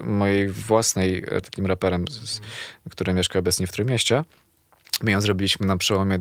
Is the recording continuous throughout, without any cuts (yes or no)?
no